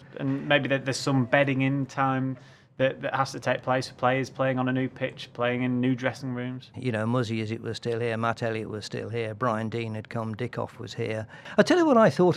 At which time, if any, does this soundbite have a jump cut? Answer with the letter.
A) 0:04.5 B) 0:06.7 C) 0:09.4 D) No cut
B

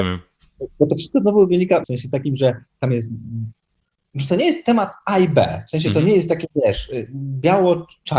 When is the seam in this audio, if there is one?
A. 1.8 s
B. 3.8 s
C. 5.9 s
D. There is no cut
A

